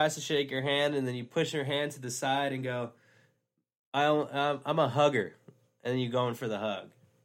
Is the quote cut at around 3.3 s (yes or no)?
no